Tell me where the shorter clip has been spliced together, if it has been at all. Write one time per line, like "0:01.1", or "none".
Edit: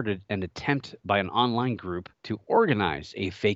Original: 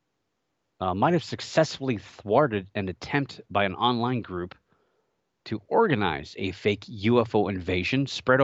0:02.1